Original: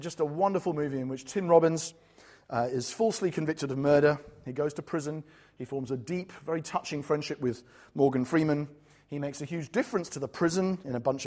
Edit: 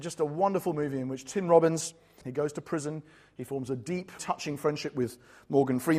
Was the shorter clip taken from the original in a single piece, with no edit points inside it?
no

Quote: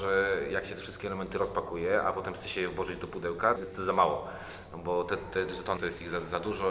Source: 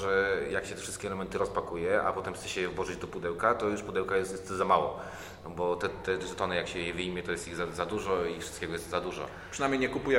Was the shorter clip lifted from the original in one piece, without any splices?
no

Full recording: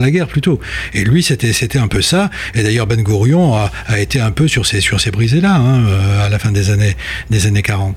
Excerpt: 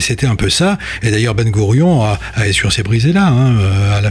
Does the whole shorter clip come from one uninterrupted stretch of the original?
no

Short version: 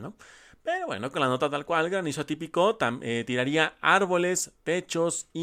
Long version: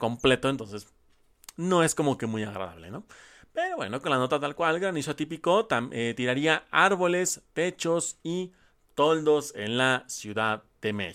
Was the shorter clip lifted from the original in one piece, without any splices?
yes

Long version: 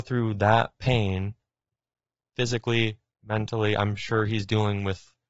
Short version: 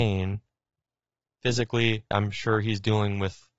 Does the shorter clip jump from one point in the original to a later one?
yes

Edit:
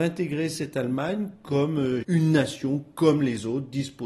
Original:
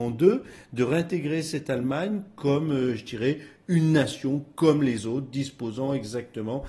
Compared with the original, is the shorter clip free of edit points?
no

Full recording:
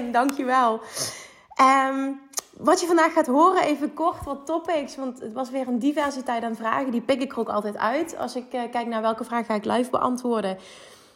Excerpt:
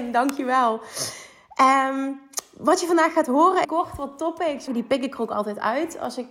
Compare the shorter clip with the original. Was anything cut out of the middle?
yes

